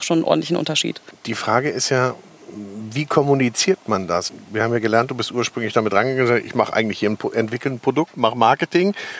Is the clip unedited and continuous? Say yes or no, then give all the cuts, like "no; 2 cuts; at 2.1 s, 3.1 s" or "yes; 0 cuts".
no; 1 cut; at 8.1 s